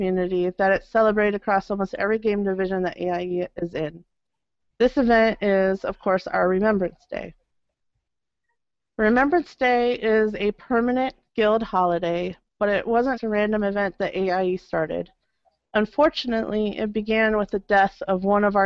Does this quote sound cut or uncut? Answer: cut